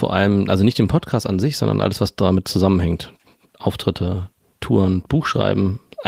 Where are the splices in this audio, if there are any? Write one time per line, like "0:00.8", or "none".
none